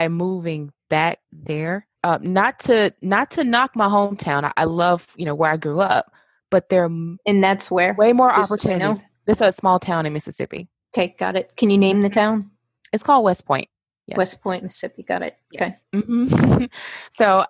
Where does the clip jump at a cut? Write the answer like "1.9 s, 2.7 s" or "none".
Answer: none